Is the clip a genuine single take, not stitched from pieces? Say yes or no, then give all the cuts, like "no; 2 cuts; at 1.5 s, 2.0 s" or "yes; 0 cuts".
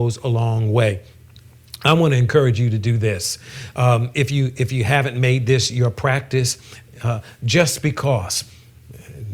yes; 0 cuts